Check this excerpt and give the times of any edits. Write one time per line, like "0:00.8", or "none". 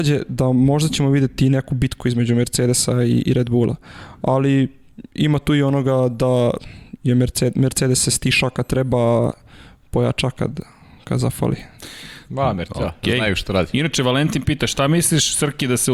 none